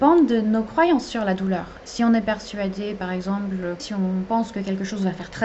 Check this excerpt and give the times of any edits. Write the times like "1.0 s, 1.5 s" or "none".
3.8 s